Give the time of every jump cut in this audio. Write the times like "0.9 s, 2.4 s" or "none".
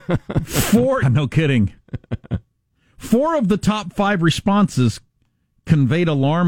1.0 s